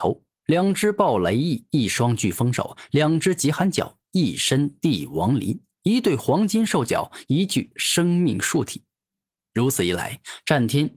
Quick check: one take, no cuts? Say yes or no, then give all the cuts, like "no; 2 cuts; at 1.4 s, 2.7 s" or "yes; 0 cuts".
yes; 0 cuts